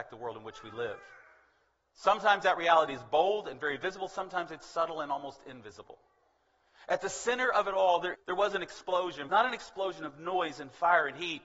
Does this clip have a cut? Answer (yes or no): yes